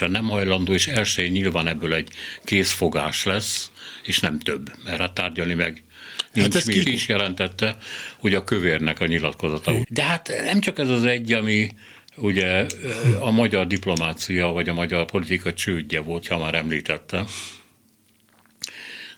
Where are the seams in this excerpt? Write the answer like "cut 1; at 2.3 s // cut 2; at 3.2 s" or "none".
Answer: cut 1; at 6.8 s // cut 2; at 9.8 s // cut 3; at 16.2 s